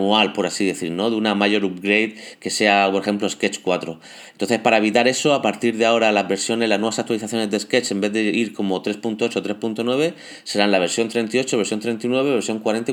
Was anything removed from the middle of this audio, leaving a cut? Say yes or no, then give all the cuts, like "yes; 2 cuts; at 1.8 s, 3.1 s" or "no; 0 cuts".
no; 0 cuts